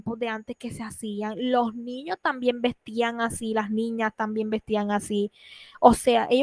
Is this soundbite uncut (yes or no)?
yes